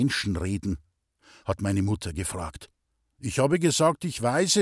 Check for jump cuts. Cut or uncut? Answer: cut